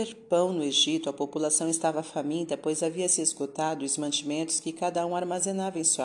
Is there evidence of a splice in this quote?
no; 0 cuts

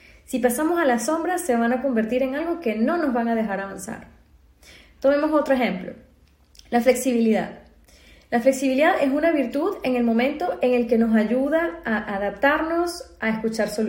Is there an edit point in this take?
no; 0 cuts

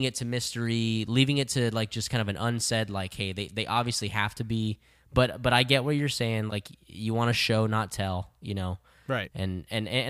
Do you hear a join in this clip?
yes; 1 cut; at 6.5 s

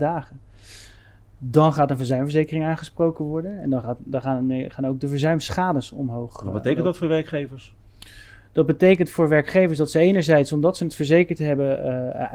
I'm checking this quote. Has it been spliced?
no; 0 cuts

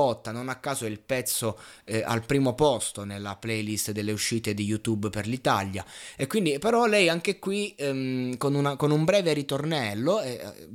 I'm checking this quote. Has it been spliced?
no; 0 cuts

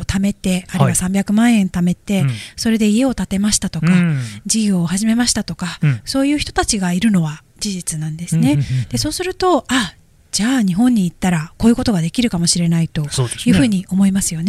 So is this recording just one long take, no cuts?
yes; 0 cuts

